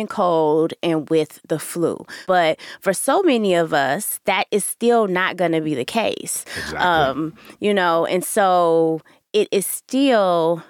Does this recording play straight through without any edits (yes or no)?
yes